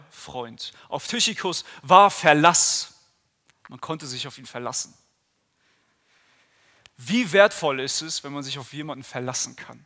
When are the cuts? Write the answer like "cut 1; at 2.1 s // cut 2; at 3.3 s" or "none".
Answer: none